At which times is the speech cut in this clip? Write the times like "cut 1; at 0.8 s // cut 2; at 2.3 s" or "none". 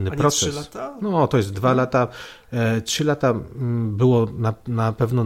none

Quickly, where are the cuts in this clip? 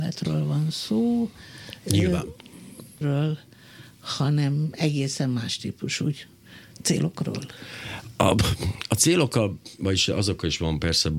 cut 1; at 3.0 s

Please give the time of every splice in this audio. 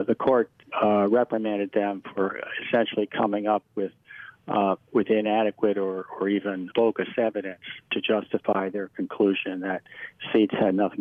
cut 1; at 6.7 s

